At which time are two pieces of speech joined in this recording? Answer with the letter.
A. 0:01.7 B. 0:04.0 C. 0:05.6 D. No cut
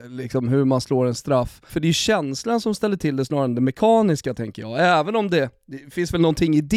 A